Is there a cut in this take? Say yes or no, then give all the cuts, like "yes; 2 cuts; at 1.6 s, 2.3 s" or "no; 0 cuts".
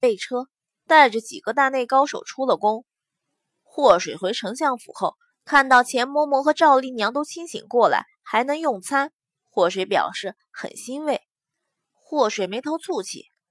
yes; 2 cuts; at 5.3 s, 11.8 s